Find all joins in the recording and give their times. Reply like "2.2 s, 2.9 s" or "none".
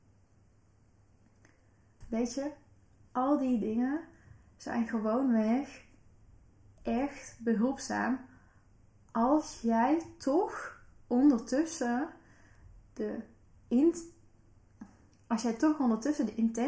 2.0 s